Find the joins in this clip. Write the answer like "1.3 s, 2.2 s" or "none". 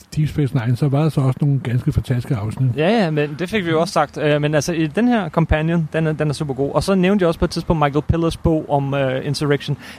none